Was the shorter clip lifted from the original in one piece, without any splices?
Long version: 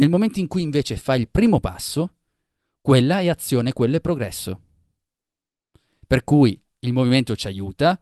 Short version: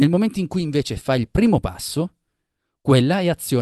yes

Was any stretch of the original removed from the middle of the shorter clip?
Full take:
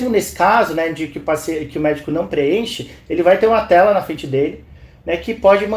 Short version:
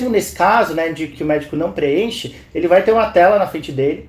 yes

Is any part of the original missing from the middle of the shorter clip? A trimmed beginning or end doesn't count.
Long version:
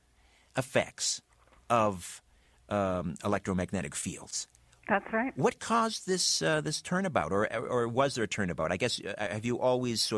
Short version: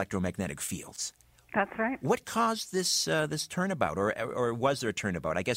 no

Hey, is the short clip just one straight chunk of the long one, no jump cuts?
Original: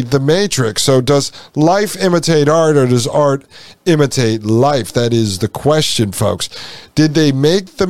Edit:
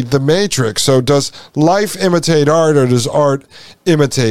yes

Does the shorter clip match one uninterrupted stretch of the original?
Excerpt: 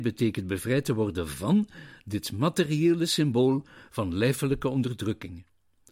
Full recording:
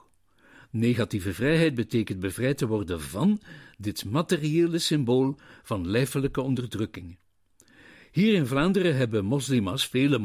yes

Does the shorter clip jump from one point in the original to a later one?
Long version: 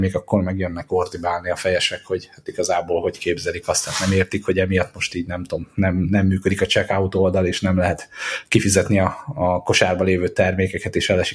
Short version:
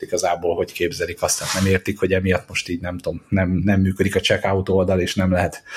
no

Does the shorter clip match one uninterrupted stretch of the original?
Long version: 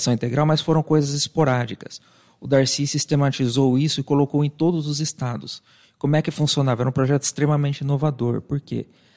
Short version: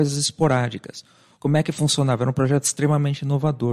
no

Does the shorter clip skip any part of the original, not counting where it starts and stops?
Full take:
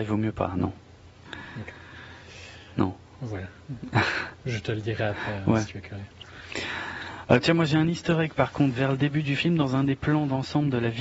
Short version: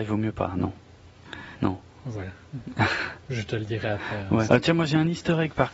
yes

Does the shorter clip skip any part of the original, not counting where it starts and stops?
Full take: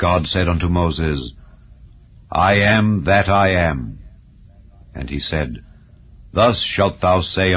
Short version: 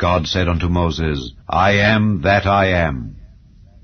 yes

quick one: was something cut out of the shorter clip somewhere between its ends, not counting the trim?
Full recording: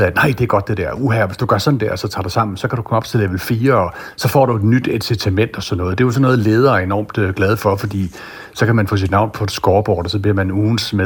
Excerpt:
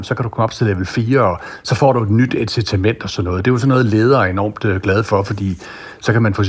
no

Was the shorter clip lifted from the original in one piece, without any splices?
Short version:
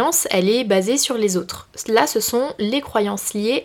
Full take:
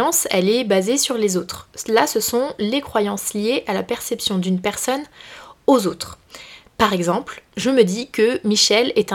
yes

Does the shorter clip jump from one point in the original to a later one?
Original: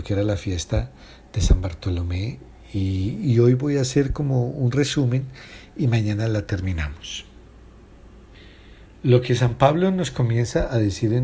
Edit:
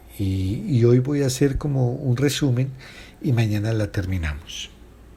no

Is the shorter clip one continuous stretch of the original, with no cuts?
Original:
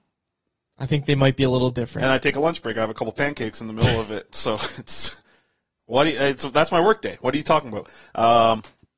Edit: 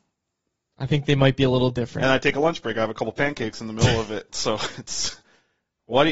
yes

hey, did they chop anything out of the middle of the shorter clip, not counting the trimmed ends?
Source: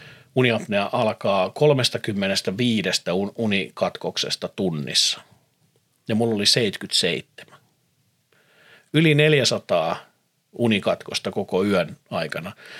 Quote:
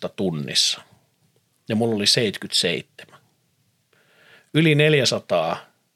no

